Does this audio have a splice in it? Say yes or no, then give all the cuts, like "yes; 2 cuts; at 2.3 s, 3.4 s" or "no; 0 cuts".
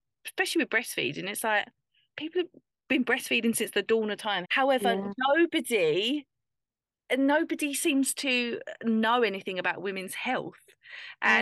yes; 1 cut; at 4.4 s